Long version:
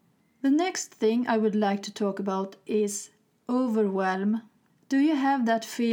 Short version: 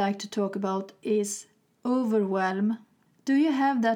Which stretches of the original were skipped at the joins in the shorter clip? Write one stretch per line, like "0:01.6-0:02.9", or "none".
none